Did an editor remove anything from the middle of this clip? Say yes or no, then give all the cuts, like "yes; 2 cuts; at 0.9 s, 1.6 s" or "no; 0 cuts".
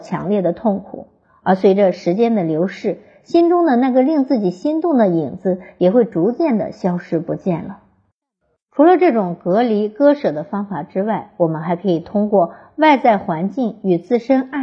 no; 0 cuts